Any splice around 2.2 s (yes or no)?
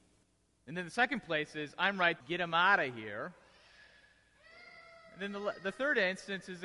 yes